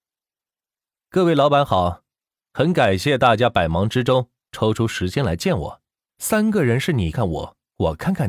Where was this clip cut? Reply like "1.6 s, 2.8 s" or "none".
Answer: 6.1 s, 7.1 s